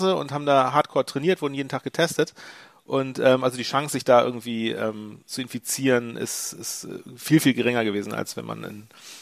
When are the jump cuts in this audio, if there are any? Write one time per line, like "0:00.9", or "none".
none